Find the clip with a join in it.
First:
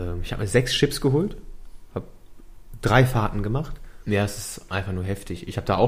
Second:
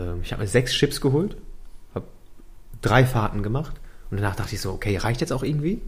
first; 1 cut; at 4.0 s

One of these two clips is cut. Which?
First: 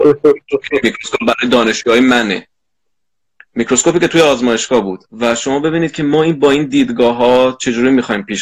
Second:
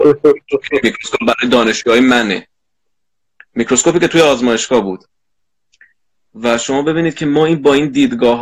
first; 1 cut; at 5.1 s

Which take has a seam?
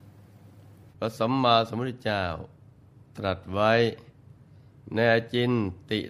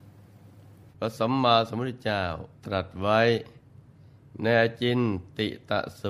second; 1 cut; at 2.6 s

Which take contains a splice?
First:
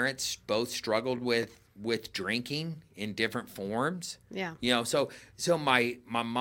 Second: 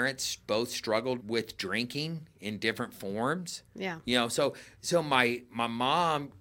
second; 1 cut; at 1.2 s

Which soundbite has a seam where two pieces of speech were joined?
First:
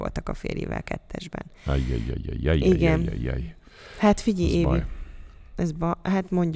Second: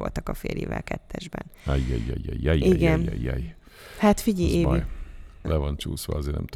second; 1 cut; at 5.4 s

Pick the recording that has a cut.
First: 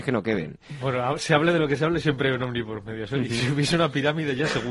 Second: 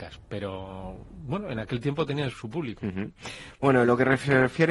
second; 1 cut; at 2.3 s

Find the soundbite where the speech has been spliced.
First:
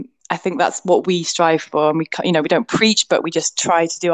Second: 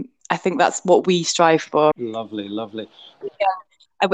second; 2 cuts; at 1.9 s, 3.2 s

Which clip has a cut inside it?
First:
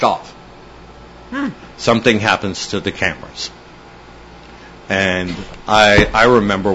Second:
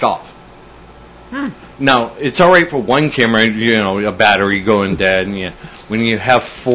first; 1 cut; at 1.7 s

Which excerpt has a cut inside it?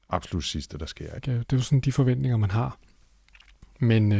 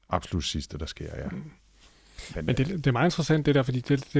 first; 1 cut; at 1.2 s

